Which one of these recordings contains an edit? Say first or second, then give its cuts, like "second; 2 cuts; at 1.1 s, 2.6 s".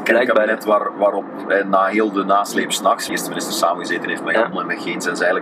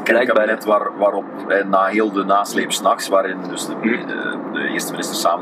first; 2 cuts; at 3.1 s, 4.5 s